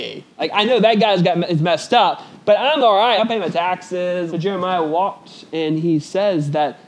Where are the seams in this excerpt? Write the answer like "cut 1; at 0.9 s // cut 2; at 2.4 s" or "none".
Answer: cut 1; at 3.2 s // cut 2; at 4.3 s